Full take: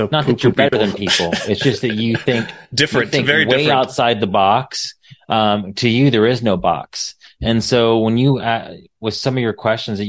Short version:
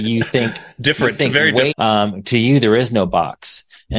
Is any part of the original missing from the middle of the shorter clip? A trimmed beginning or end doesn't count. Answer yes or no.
yes